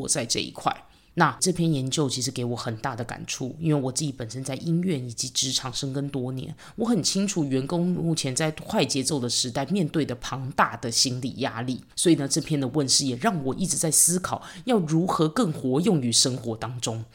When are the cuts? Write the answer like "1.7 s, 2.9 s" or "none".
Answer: 11.9 s